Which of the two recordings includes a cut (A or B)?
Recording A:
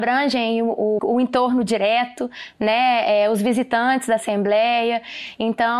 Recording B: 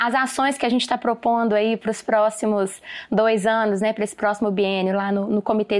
A